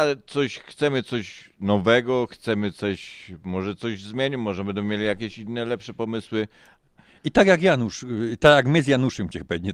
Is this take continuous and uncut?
yes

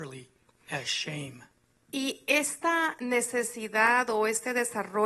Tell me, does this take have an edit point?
no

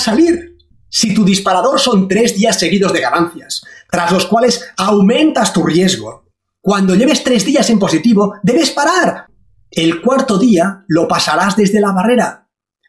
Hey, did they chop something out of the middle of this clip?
yes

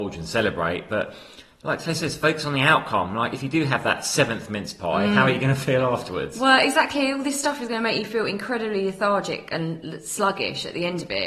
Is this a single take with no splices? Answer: yes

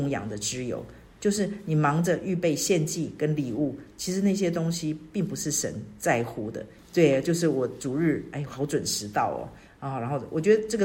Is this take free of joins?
no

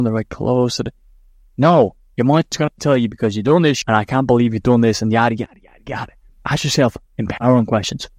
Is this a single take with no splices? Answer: no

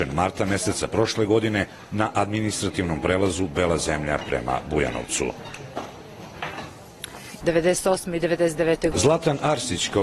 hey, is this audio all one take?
no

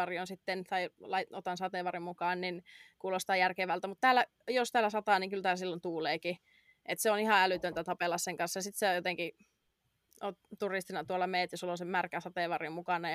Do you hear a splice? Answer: no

